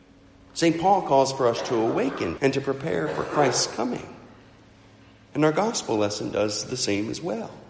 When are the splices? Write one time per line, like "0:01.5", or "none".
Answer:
0:02.4